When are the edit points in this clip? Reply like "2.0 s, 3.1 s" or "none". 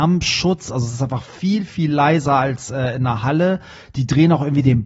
none